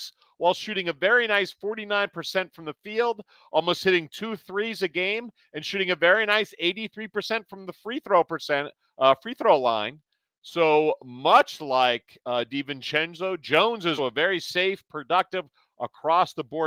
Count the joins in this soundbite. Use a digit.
2